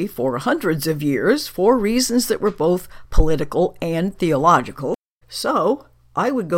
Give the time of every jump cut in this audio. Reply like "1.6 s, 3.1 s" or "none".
5.2 s